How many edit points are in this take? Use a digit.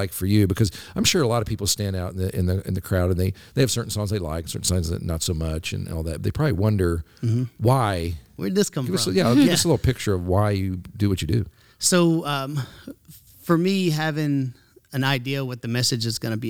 0